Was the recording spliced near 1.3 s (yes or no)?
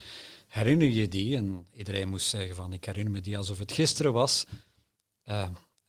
no